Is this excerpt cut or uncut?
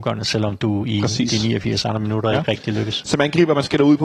uncut